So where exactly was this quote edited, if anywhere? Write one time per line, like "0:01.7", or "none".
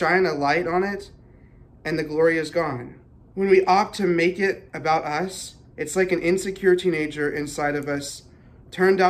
0:03.3